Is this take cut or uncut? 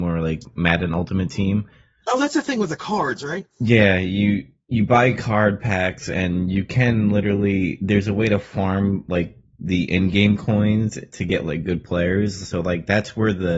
uncut